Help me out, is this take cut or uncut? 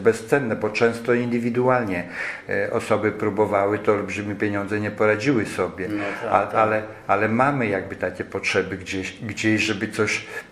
uncut